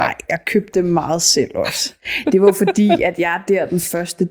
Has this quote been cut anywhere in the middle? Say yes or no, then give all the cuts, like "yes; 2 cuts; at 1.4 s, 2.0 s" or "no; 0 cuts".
no; 0 cuts